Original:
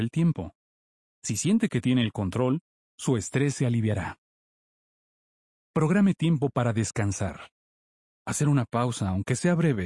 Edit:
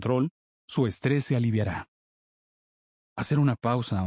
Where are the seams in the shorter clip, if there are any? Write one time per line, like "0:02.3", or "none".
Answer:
0:03.0